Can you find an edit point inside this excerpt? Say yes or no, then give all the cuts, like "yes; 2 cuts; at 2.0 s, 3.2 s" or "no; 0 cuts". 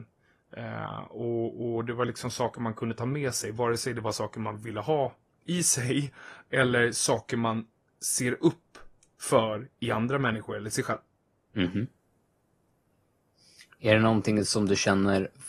no; 0 cuts